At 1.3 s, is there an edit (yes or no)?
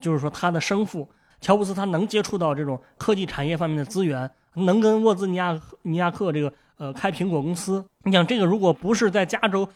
yes